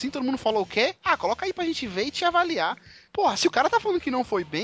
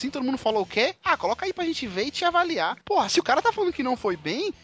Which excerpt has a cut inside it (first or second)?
second